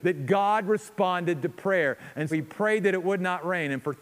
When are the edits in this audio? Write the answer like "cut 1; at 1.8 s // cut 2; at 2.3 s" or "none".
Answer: cut 1; at 2.3 s